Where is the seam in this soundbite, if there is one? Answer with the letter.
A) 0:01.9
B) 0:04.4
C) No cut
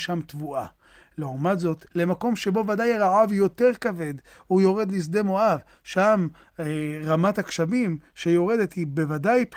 A